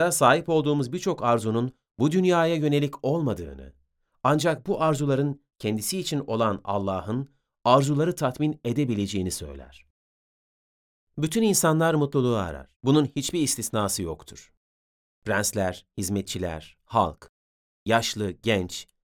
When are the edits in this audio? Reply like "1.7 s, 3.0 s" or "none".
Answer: 12.7 s, 15.1 s, 16.8 s